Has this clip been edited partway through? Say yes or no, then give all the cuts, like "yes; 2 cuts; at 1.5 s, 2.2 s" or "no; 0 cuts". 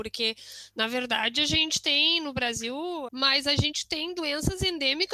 yes; 1 cut; at 3.1 s